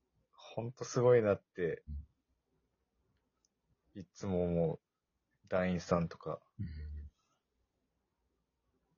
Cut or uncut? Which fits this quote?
uncut